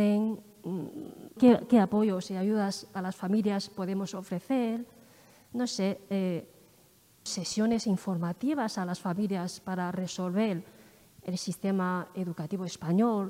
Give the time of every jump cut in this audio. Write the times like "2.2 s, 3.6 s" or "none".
1.4 s, 7.3 s